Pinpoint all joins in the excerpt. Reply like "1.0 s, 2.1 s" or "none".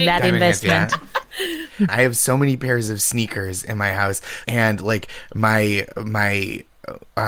1.9 s, 4.4 s